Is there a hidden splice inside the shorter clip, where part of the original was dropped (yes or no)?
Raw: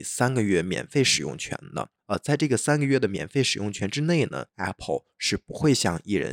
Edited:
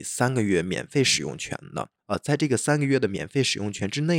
no